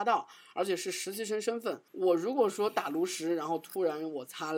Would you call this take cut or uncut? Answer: cut